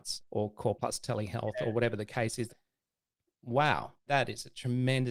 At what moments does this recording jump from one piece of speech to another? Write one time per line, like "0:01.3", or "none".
0:02.5